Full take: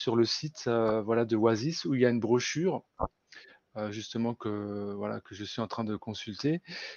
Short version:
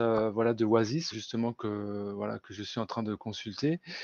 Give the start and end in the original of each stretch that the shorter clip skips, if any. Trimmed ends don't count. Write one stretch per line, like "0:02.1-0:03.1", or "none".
0:01.8-0:03.9